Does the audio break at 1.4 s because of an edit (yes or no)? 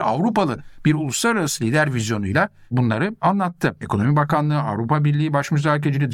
no